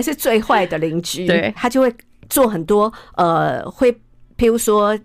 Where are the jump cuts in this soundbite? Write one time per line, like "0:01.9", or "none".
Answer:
0:01.6